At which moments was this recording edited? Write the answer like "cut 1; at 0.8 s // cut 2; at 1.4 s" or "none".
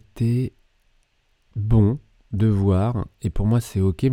none